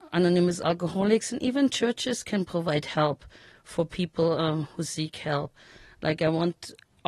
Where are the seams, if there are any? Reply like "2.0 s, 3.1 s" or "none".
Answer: none